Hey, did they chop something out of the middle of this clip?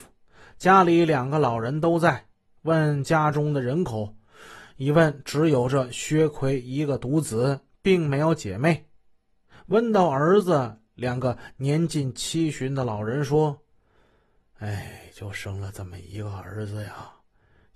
no; 0 cuts

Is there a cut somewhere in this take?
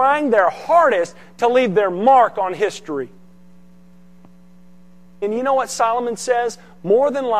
yes; 1 cut; at 5.2 s

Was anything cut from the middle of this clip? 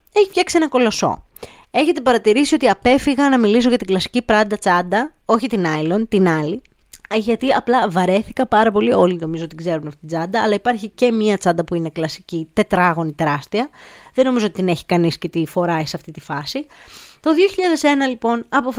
no; 0 cuts

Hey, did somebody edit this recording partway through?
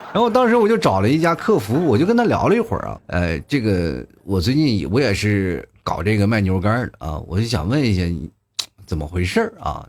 yes; 1 cut; at 3.0 s

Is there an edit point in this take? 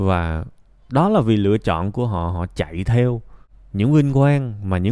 no; 0 cuts

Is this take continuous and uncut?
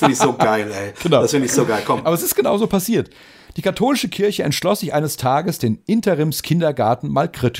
yes; 0 cuts

